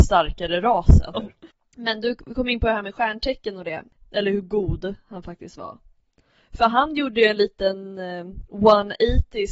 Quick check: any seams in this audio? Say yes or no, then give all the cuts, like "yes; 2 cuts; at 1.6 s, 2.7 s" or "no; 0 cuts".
yes; 2 cuts; at 1.1 s, 4.0 s